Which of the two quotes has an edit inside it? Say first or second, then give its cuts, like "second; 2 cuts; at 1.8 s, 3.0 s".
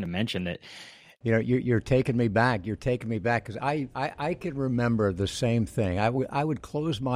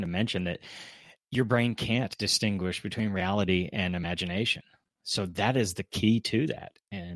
first; 1 cut; at 1.2 s